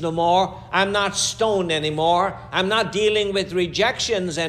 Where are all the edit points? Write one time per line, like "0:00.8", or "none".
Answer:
none